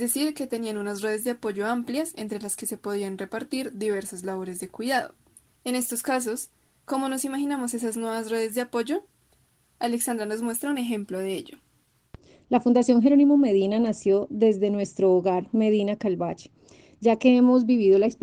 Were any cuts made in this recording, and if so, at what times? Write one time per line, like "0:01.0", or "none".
0:05.5